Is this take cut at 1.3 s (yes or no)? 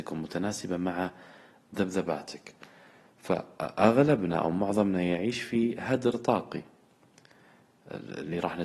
no